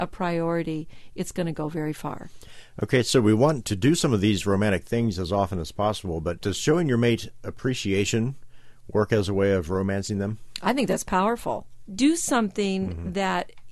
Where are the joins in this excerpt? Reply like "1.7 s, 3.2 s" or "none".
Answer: 11.9 s

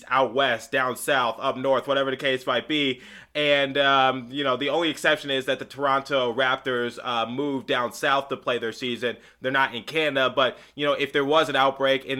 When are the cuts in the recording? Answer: none

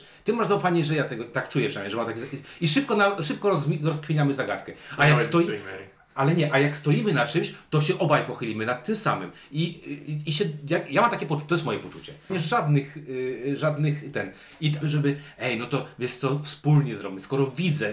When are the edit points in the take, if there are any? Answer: 12.3 s, 14.8 s

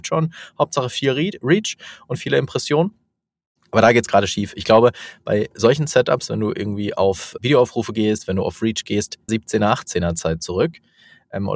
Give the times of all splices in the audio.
7.4 s, 9.3 s

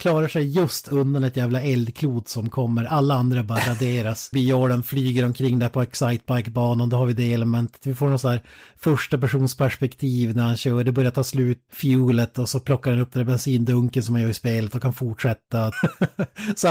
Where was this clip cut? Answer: 4.3 s, 11.7 s, 15.7 s

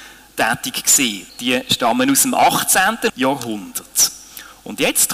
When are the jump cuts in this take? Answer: 1.3 s, 3.1 s

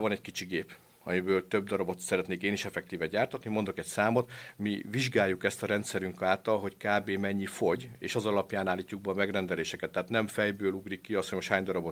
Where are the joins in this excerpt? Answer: none

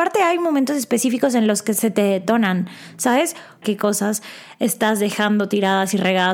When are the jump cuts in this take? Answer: 3.6 s

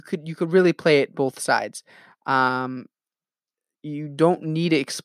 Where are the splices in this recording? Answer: none

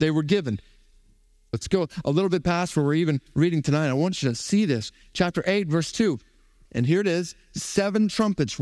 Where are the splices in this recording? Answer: 1.5 s, 6.7 s

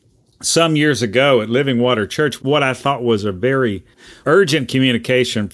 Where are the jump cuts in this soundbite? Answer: 2.4 s

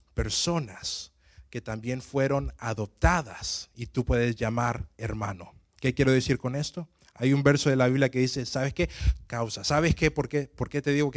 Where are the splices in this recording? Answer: 4.9 s, 9.2 s

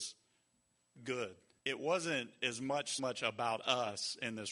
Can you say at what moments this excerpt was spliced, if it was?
1.6 s, 3.0 s

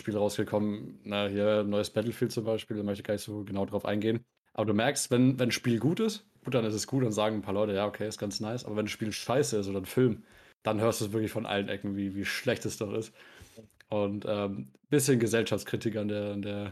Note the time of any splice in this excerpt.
6.4 s

